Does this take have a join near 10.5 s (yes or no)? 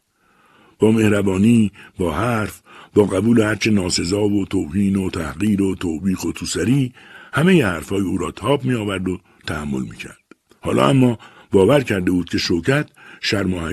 yes